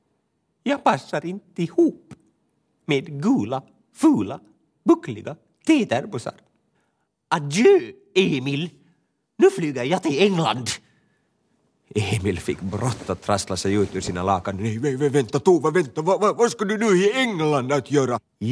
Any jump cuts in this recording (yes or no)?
no